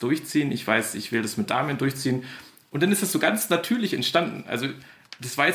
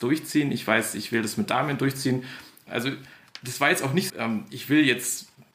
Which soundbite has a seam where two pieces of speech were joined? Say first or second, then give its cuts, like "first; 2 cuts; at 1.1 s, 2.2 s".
second; 2 cuts; at 2.7 s, 4.1 s